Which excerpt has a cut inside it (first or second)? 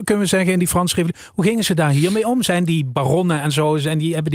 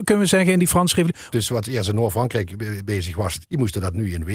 second